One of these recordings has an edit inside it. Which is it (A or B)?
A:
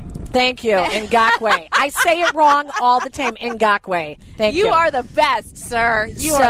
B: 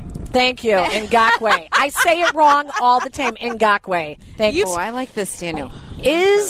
B